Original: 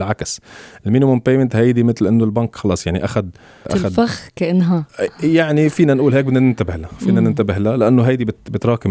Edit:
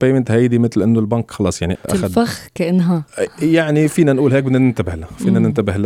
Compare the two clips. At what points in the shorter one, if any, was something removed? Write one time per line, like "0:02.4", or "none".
0:01.8